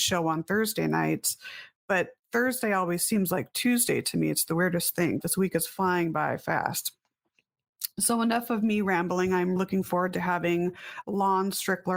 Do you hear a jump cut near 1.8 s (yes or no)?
no